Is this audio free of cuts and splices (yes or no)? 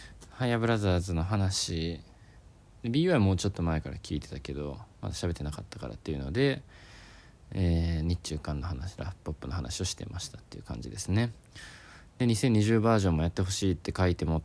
yes